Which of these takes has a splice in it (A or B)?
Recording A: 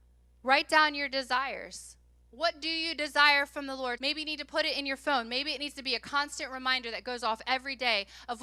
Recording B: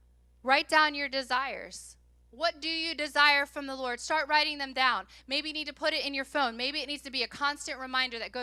A